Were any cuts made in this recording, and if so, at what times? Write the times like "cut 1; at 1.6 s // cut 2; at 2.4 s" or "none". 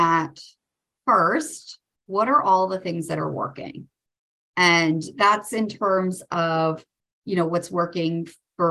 none